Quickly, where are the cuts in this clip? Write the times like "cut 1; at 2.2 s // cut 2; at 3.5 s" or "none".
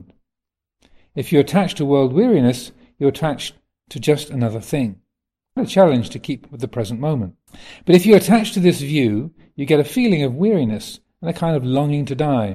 cut 1; at 5.6 s // cut 2; at 7.5 s